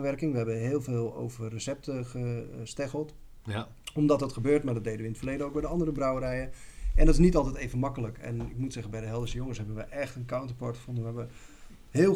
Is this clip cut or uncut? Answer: uncut